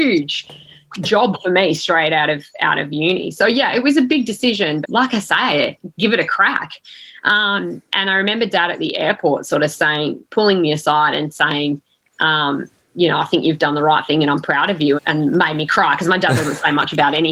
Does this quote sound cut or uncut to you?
cut